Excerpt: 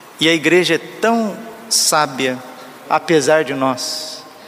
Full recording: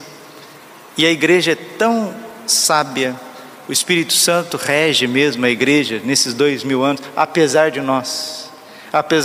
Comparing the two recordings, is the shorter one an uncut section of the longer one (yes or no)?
no